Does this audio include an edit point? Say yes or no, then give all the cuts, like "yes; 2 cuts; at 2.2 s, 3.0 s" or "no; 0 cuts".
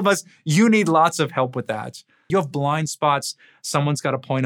yes; 1 cut; at 2.3 s